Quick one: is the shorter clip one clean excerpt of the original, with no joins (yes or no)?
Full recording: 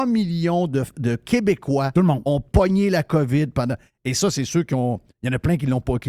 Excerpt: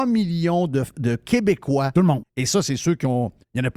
no